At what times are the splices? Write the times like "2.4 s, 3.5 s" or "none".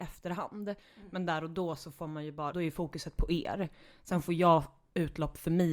2.5 s